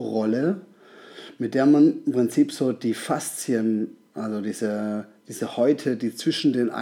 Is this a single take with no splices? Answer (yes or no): yes